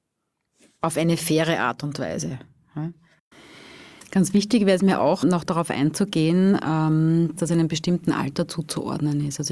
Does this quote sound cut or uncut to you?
cut